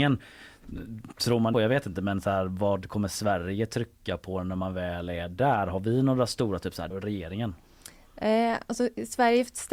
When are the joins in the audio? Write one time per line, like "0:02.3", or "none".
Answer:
0:01.5
0:06.9